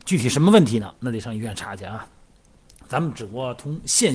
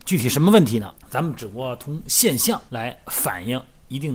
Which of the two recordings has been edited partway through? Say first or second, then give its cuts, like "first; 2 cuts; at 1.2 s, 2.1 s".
second; 2 cuts; at 1.0 s, 2.7 s